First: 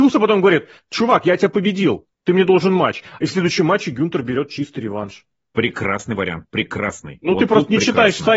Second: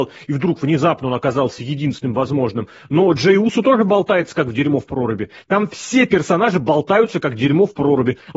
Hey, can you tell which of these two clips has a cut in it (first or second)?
first